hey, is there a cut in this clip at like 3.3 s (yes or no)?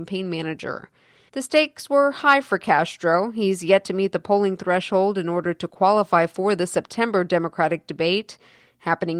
no